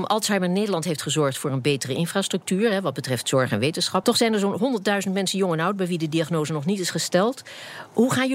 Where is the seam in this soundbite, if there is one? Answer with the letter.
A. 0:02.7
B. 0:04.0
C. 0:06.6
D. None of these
B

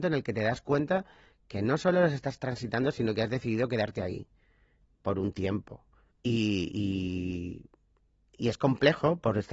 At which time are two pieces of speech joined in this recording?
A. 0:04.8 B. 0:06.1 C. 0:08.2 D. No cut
B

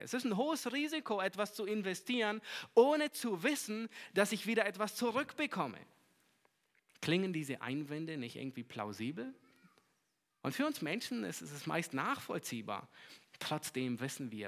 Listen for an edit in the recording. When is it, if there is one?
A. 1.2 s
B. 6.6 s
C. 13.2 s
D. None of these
D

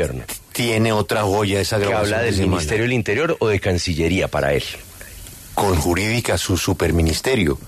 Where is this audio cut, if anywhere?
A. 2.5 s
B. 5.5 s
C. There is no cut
B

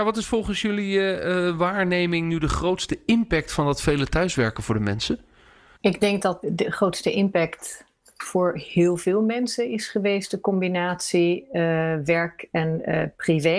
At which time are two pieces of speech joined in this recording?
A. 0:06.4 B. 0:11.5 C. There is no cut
A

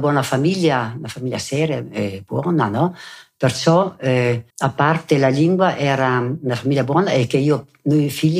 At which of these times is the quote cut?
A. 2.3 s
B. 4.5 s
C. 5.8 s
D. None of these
B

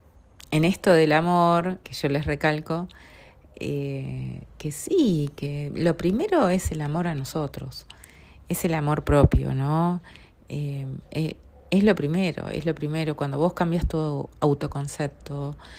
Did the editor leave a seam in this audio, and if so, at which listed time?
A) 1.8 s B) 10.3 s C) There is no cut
A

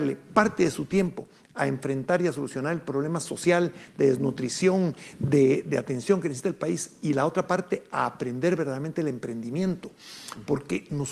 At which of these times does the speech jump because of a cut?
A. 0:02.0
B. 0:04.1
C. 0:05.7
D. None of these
D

